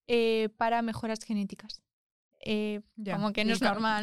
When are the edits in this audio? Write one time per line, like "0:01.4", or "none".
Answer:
0:02.3